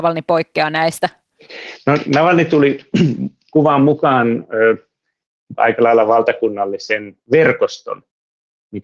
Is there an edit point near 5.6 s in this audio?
yes; 2 cuts; at 5.6 s, 7.2 s

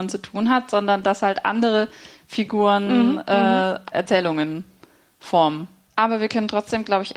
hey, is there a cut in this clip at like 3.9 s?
yes; 2 cuts; at 3.9 s, 5.9 s

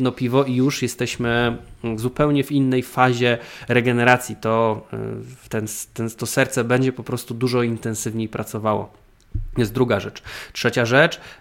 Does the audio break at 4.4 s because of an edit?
no; 0 cuts

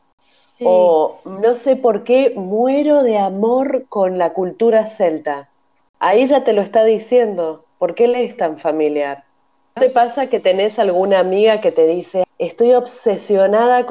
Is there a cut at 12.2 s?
yes; 2 cuts; at 9.8 s, 12.2 s

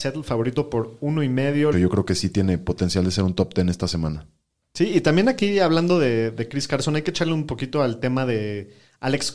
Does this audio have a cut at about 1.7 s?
yes; 1 cut; at 1.7 s

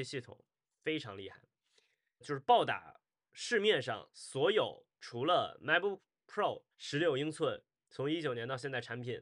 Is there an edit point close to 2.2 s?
yes; 2 cuts; at 2.2 s, 6.7 s

